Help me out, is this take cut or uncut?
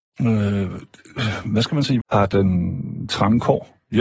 cut